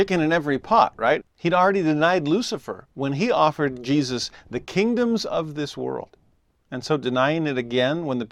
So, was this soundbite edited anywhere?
yes; 1 cut; at 1.2 s

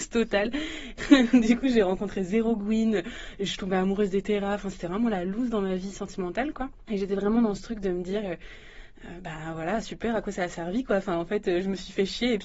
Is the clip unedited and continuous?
yes; 0 cuts

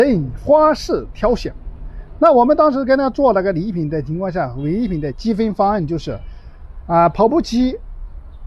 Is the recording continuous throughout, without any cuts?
yes; 0 cuts

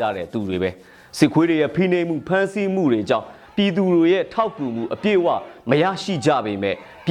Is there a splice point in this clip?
no; 0 cuts

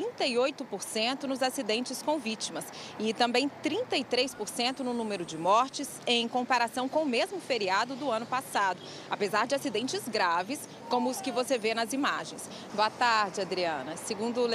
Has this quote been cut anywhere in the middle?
yes; 1 cut; at 12.7 s

